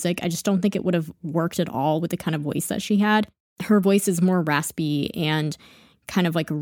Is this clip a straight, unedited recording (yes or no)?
yes